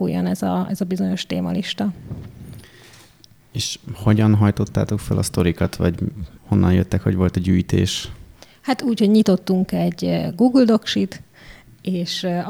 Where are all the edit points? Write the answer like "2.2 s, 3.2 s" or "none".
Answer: none